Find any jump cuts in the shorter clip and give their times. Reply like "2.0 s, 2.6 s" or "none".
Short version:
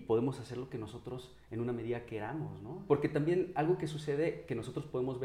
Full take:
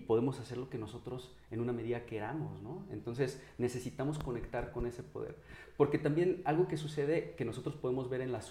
2.9 s